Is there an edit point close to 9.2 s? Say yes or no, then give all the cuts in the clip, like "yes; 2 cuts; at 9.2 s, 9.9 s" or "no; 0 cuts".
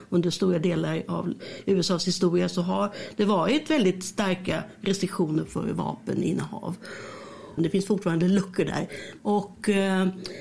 yes; 2 cuts; at 7.6 s, 9.2 s